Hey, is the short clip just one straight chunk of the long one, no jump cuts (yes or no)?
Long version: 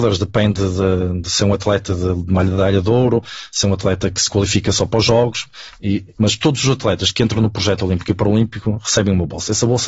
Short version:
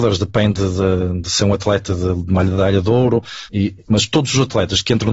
no